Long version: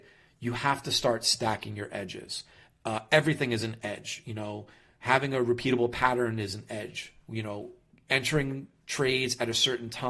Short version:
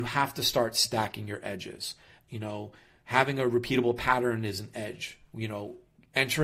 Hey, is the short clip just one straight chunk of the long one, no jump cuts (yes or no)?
no